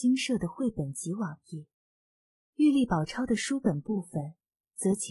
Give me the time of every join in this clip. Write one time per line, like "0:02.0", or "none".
none